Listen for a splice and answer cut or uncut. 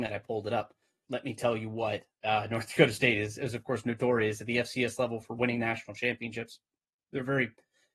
cut